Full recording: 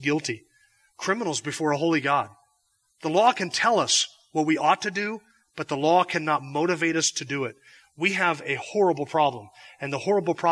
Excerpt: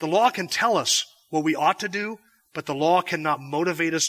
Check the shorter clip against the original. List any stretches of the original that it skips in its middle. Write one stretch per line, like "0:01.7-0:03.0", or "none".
none